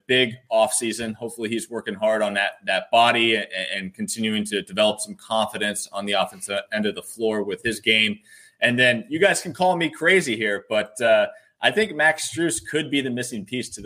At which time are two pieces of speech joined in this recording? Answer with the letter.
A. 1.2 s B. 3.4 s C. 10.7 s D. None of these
D